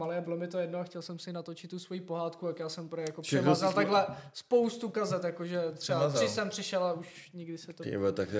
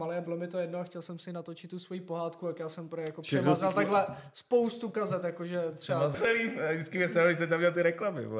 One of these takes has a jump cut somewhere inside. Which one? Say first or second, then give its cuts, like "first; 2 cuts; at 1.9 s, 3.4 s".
second; 1 cut; at 6.1 s